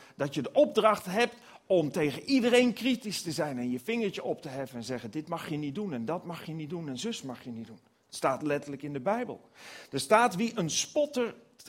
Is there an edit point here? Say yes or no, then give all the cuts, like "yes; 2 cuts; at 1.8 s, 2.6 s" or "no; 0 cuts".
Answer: no; 0 cuts